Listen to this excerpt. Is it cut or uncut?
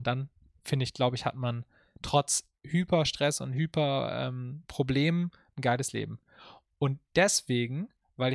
uncut